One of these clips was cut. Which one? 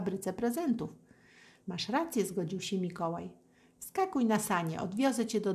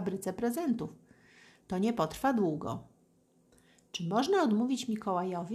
first; 1 cut; at 1.6 s

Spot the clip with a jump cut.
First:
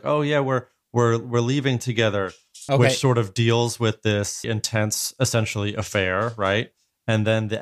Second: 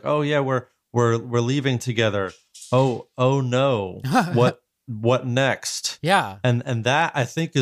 first; 2 cuts; at 2.7 s, 4.4 s

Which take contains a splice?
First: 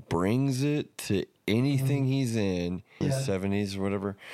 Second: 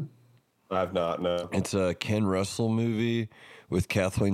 first; 1 cut; at 3.0 s

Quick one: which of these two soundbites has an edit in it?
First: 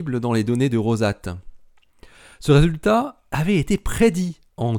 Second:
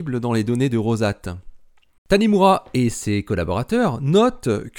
second; 1 cut; at 2.0 s

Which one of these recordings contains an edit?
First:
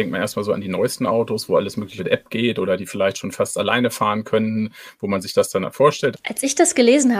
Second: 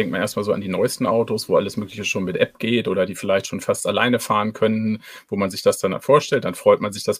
first; 2 cuts; at 2.0 s, 6.1 s

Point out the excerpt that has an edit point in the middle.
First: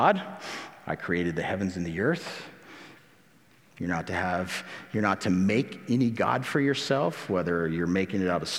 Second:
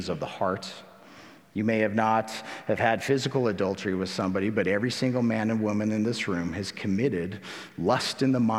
first; 1 cut; at 3.7 s

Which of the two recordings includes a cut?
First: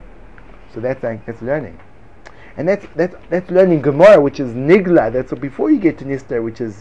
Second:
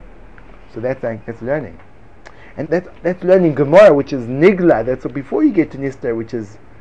second; 1 cut; at 2.6 s

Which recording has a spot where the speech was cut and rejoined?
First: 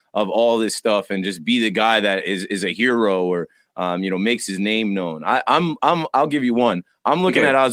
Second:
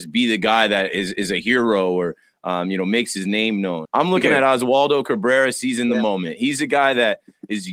second; 1 cut; at 3.8 s

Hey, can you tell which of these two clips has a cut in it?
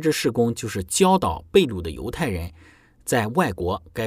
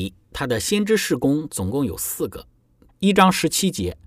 second; 1 cut; at 2.9 s

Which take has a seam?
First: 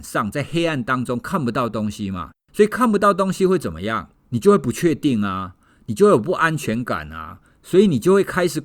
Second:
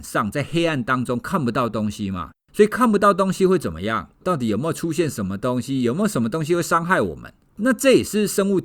second; 1 cut; at 4.2 s

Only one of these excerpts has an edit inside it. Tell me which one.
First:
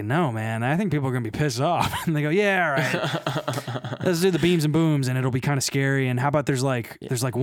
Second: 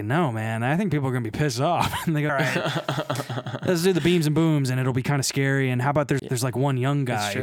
second; 2 cuts; at 2.3 s, 6.2 s

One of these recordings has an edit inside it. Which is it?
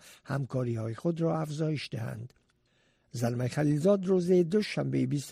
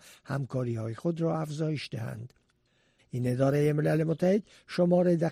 second; 1 cut; at 3.0 s

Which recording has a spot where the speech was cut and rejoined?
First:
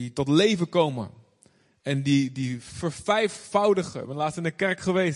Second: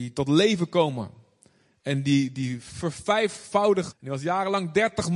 second; 1 cut; at 3.9 s

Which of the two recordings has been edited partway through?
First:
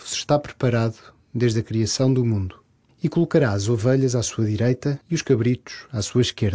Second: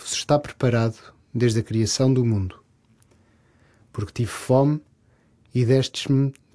first; 2 cuts; at 2.9 s, 5.0 s

